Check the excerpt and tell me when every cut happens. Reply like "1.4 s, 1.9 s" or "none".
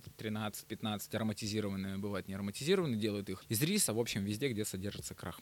3.9 s